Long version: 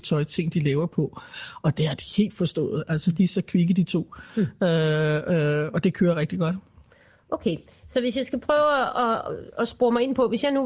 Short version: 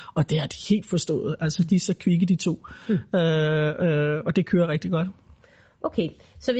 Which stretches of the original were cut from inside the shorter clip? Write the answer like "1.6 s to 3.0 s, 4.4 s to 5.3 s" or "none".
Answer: none